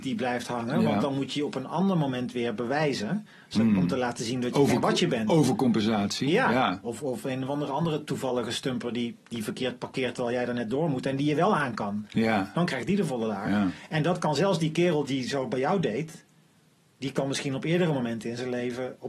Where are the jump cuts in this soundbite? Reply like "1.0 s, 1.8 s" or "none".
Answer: 6.8 s, 15.0 s